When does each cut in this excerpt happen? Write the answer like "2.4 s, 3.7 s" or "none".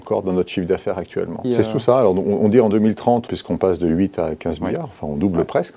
1.4 s, 3.3 s